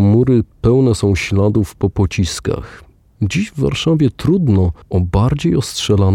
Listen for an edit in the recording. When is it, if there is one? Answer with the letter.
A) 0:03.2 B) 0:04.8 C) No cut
B